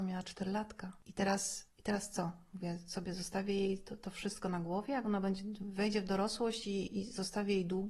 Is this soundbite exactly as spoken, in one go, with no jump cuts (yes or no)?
yes